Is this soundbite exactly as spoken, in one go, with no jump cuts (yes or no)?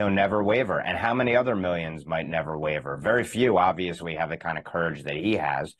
yes